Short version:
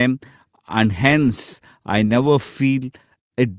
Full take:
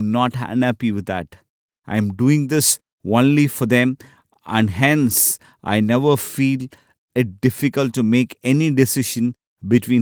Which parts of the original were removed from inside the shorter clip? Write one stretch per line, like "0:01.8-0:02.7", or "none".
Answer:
none